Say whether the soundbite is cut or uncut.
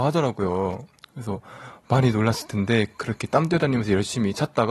uncut